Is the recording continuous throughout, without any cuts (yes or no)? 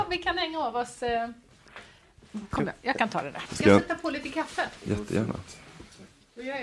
no